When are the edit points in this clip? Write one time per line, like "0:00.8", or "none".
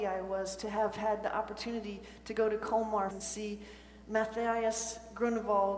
0:03.1